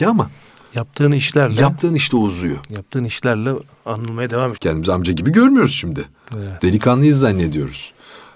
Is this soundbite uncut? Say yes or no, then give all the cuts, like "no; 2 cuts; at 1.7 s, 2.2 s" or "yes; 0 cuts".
no; 2 cuts; at 4.6 s, 6.6 s